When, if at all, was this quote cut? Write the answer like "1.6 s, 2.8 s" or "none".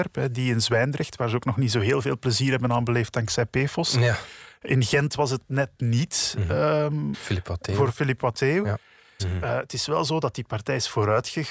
7.1 s, 9.2 s